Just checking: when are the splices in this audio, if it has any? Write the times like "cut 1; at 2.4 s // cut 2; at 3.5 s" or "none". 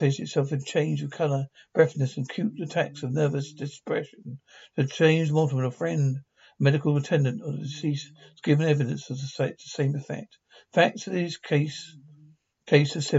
none